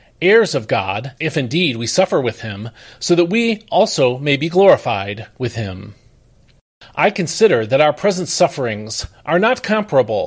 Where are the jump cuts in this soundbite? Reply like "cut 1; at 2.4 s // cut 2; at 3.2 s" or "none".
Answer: cut 1; at 1.2 s